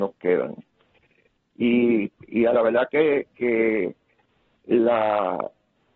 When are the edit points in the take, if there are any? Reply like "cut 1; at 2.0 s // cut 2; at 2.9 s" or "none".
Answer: none